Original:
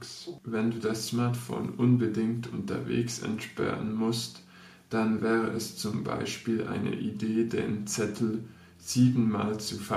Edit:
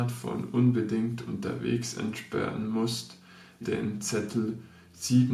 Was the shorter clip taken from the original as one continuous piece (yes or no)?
no